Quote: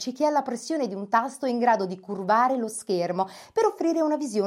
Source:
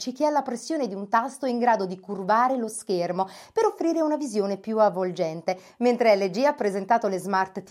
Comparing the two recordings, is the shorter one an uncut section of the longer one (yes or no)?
yes